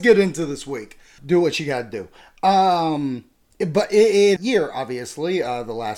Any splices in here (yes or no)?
yes